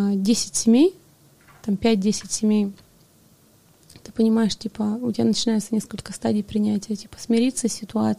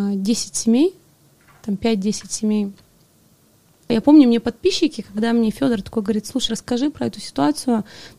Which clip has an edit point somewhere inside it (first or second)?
second